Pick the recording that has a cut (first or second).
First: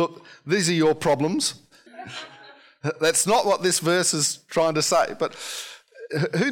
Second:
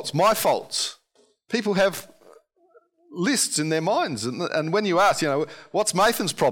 first